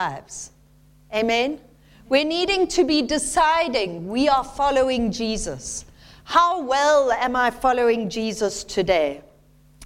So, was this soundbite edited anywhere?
no; 0 cuts

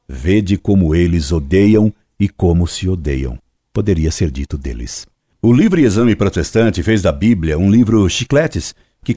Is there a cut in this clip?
no; 0 cuts

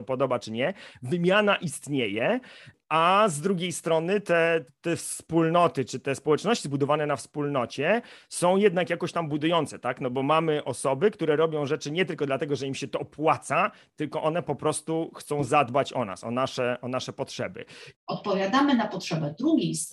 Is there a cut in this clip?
yes; 2 cuts; at 4.7 s, 17.9 s

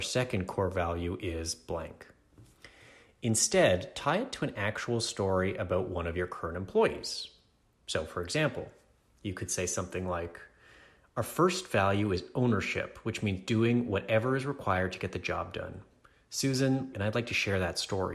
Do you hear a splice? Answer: yes; 1 cut; at 16.9 s

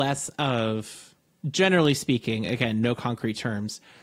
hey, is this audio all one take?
yes; 0 cuts

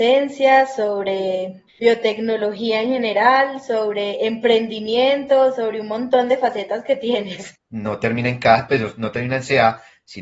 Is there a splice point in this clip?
yes; 2 cuts; at 7.6 s, 8.7 s

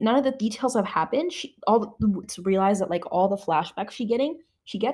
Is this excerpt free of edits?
no; 1 cut; at 2.2 s

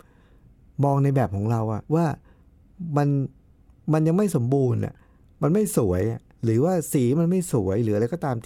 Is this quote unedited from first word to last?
no; 1 cut; at 1.9 s

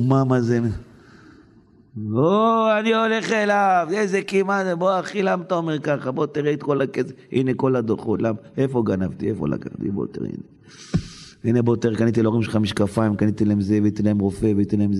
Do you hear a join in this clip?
no; 0 cuts

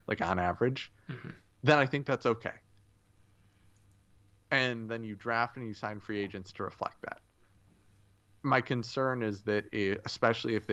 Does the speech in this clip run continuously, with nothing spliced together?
yes; 0 cuts

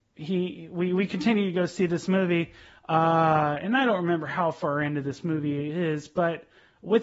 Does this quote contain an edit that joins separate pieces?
no; 0 cuts

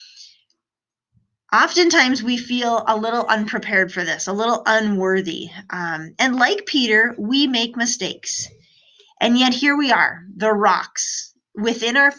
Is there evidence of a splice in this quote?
no; 0 cuts

